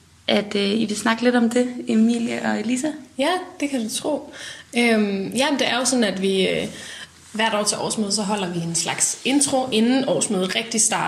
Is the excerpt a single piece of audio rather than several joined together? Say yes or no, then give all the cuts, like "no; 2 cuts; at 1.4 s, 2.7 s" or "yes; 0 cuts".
yes; 0 cuts